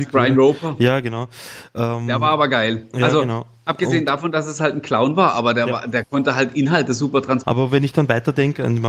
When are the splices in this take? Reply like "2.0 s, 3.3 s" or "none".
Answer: 7.4 s